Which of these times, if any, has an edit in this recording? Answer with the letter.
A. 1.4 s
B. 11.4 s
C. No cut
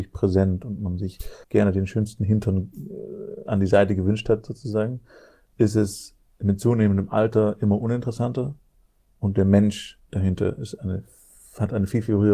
A